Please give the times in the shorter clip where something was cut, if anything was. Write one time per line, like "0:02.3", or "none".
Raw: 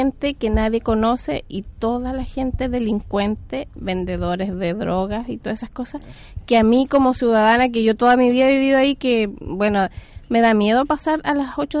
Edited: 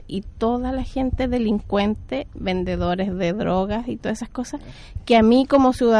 none